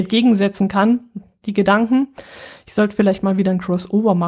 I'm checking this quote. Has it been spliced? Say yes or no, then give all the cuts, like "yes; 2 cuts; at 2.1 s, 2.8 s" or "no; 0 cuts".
no; 0 cuts